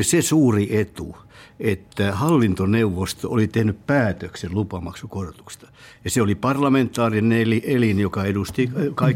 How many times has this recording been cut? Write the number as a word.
zero